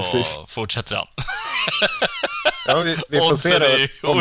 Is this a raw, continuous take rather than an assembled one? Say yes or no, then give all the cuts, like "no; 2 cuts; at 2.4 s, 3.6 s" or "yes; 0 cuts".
yes; 0 cuts